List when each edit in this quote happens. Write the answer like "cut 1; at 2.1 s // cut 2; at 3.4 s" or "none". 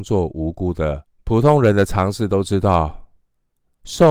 cut 1; at 1.2 s